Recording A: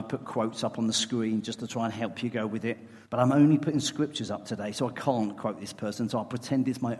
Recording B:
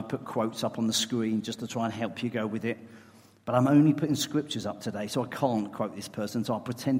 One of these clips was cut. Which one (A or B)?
A